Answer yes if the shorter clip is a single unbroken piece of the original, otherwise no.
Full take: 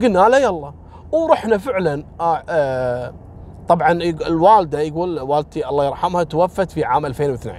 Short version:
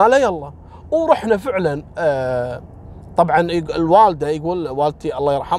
no